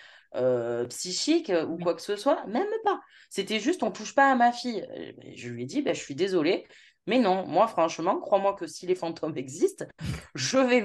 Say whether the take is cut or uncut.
uncut